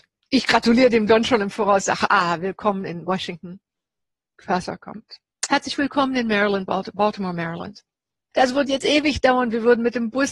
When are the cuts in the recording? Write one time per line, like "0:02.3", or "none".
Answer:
0:08.3